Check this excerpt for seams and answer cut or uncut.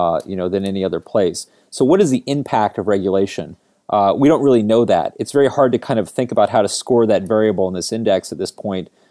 uncut